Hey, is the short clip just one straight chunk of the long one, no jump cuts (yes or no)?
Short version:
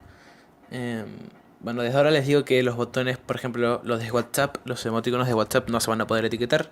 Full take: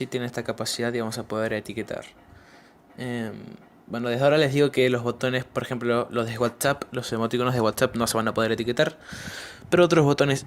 yes